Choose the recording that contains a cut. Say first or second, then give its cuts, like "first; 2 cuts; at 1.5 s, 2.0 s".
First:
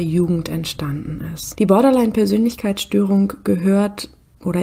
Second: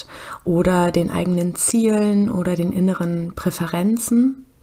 first; 1 cut; at 1.5 s